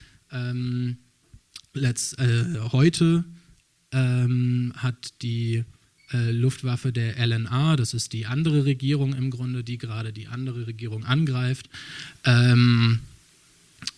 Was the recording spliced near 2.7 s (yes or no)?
no